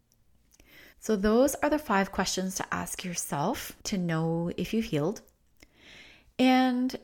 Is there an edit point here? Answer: yes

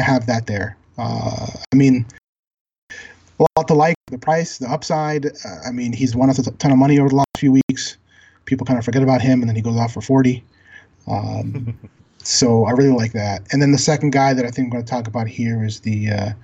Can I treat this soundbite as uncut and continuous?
yes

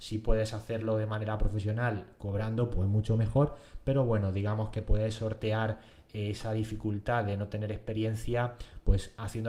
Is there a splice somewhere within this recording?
no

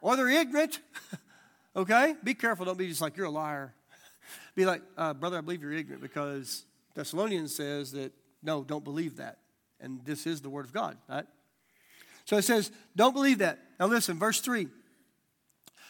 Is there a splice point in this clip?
no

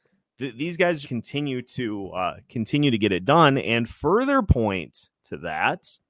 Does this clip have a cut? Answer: yes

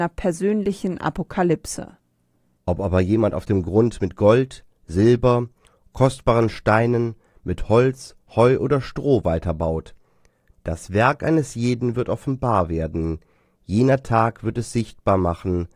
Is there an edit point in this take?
yes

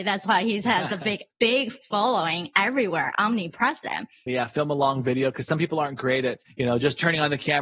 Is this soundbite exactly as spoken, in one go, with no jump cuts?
no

